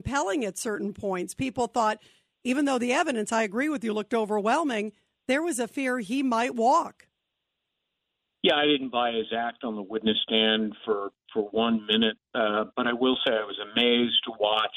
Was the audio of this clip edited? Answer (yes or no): no